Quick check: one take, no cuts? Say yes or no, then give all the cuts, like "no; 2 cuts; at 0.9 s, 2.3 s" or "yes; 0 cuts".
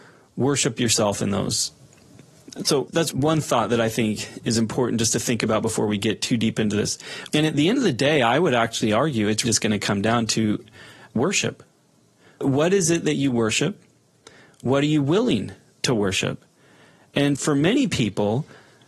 no; 2 cuts; at 7.3 s, 9.4 s